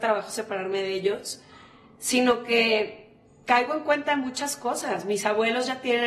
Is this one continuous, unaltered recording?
yes; 0 cuts

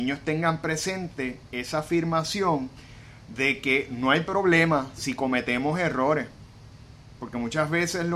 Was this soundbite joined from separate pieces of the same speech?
no; 0 cuts

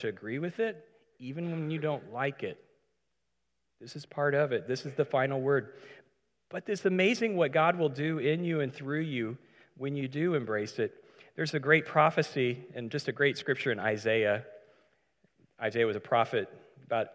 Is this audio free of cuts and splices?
yes; 0 cuts

